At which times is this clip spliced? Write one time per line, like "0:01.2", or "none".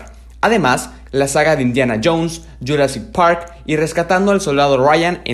0:01.1

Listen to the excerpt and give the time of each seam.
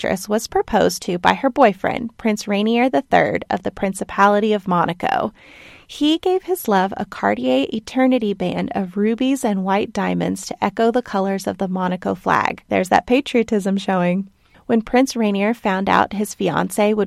0:12.6
0:14.5

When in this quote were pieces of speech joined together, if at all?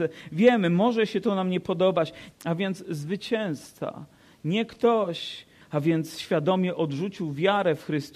0:02.3
0:05.6

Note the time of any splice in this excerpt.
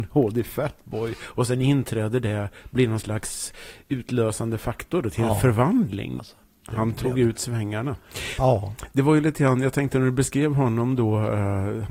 0:06.2

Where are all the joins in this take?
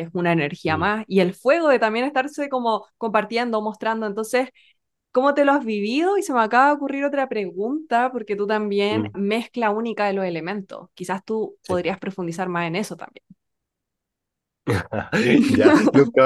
0:09.1

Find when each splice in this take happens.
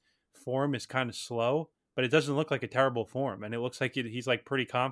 none

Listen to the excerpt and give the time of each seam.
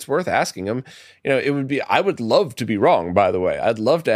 none

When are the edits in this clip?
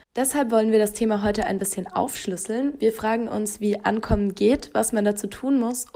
none

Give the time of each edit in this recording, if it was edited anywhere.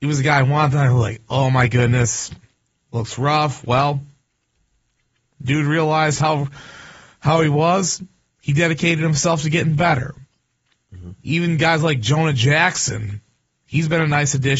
none

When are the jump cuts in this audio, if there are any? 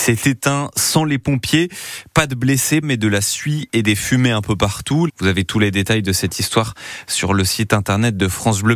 0:02.8
0:05.1

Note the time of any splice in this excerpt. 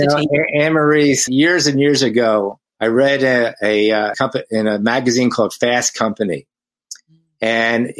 0:01.3
0:02.7
0:04.1

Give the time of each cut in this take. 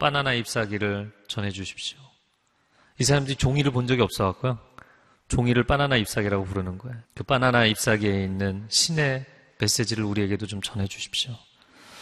0:07.1

